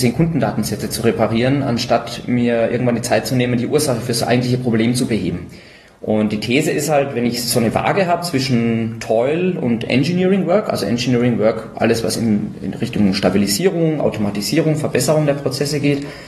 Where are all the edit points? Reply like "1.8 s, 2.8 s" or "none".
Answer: none